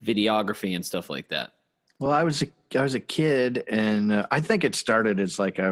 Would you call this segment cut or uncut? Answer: uncut